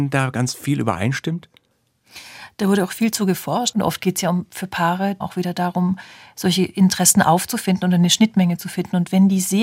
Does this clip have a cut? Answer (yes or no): yes